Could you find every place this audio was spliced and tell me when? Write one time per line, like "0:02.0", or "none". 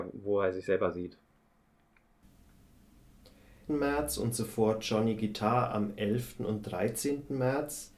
0:03.7